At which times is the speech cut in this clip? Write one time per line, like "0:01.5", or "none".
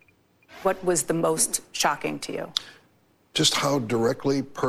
none